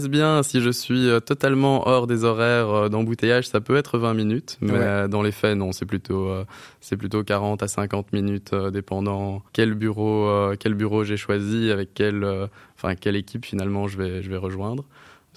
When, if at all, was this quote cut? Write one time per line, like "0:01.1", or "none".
0:09.5